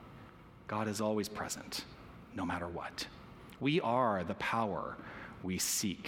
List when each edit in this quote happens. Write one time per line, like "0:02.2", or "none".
none